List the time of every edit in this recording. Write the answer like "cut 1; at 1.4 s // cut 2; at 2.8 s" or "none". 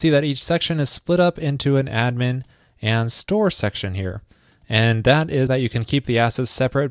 cut 1; at 5.5 s